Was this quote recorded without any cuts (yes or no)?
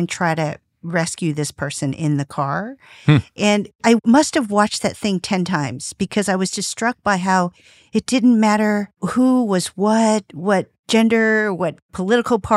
yes